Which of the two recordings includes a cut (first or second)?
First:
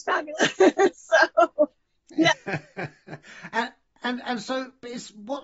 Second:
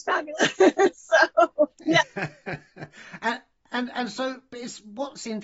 second